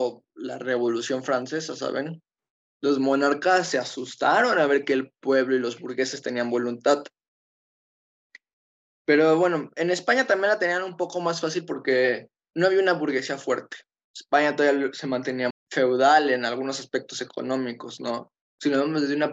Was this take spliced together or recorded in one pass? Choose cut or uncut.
cut